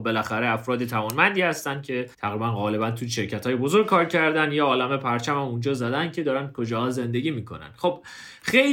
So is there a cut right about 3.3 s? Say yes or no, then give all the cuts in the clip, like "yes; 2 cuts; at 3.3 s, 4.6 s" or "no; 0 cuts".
no; 1 cut; at 2.1 s